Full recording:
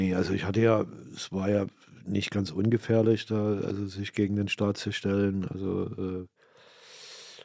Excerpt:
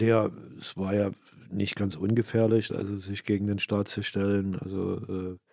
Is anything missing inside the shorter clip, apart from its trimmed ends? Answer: yes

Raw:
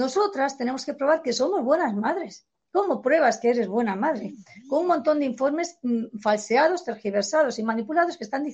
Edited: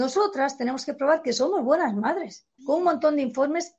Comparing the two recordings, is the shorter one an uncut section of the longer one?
no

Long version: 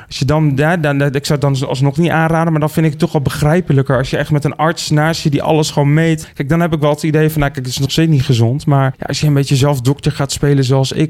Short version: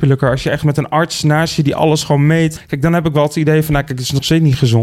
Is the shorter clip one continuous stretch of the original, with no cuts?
yes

